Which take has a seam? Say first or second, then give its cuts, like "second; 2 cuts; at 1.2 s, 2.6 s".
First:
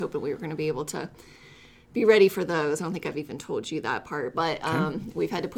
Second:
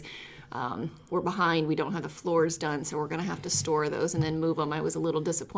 second; 1 cut; at 1.0 s